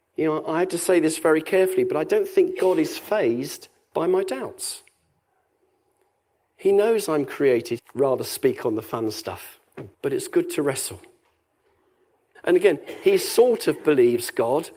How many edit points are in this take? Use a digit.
3